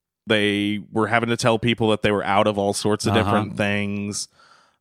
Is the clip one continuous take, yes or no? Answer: yes